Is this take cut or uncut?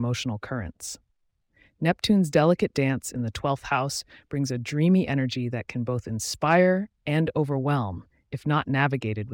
uncut